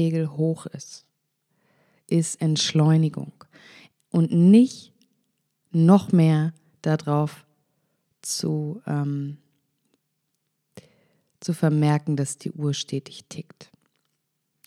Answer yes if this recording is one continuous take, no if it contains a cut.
yes